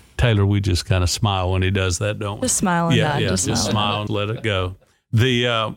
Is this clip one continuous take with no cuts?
no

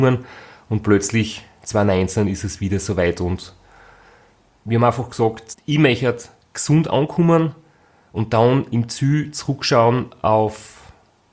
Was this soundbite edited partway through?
no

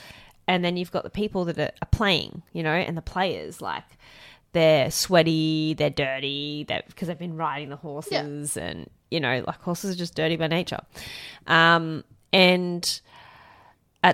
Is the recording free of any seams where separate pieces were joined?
yes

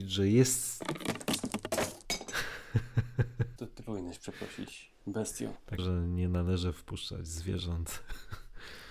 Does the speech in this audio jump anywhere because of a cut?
yes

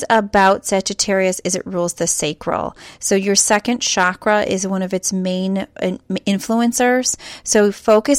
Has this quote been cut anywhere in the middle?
no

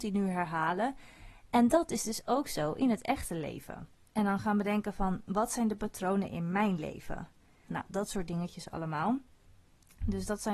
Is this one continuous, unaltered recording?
no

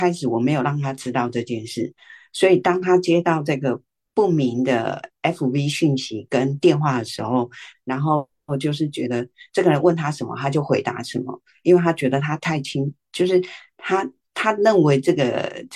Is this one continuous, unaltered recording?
no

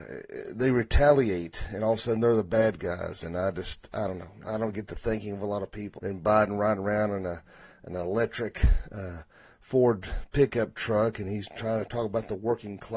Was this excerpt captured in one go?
no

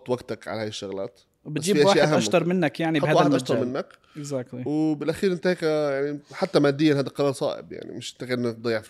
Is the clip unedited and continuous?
yes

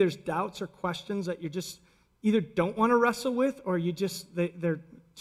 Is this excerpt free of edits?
yes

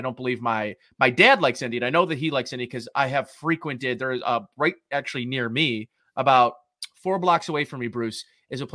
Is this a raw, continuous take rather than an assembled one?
yes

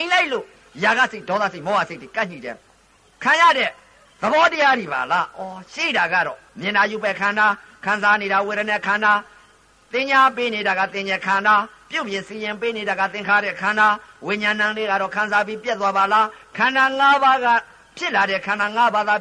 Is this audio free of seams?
no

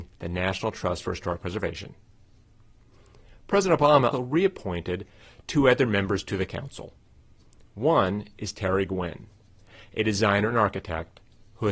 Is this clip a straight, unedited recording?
no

